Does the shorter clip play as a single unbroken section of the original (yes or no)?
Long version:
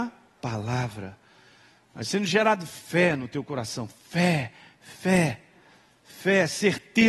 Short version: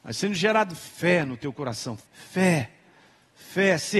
no